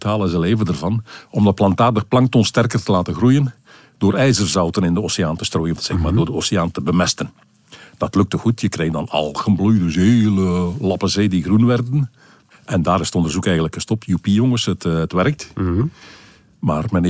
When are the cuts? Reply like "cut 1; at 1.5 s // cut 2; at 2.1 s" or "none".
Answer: cut 1; at 5.8 s